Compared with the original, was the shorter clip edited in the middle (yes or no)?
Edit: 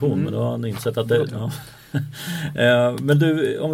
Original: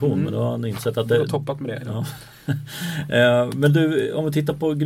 yes